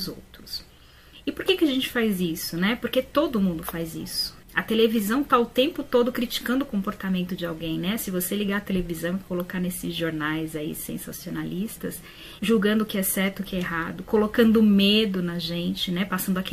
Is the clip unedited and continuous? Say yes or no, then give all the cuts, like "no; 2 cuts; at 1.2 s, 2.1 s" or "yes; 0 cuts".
no; 2 cuts; at 4.4 s, 12.4 s